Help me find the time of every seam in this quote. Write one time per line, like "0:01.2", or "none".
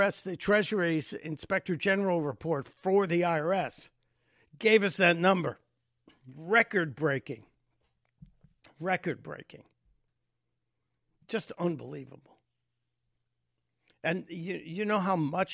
none